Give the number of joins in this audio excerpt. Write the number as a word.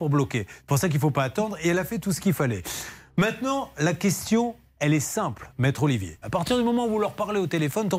one